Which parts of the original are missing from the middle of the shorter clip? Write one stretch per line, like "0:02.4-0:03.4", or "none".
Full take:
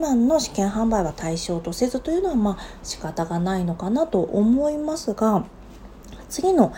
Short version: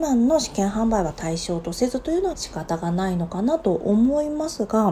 0:02.3-0:02.8